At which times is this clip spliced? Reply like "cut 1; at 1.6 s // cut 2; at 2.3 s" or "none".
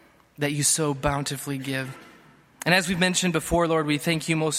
none